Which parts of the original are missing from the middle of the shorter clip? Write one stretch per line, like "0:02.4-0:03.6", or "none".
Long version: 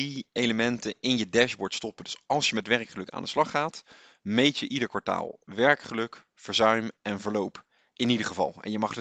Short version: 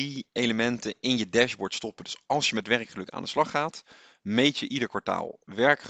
none